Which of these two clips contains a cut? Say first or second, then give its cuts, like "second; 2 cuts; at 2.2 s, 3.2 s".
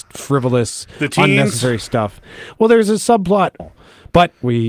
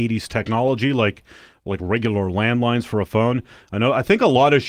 first; 1 cut; at 3.6 s